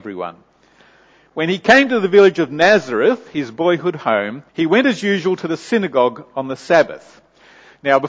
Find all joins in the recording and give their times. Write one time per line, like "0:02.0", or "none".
0:04.5